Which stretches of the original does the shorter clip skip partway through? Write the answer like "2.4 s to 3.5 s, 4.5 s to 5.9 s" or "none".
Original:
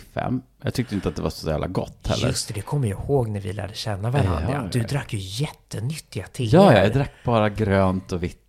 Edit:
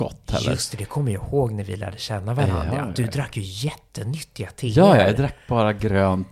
none